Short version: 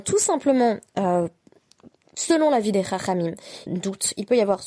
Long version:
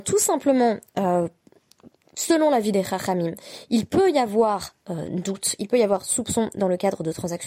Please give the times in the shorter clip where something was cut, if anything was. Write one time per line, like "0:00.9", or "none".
0:03.7